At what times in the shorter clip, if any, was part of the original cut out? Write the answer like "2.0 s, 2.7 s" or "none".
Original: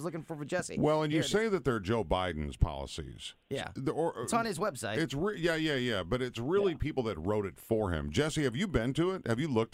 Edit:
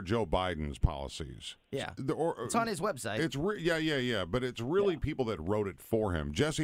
none